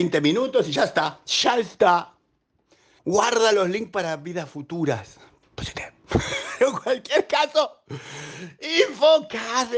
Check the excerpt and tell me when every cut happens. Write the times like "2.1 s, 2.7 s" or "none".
3.0 s, 5.4 s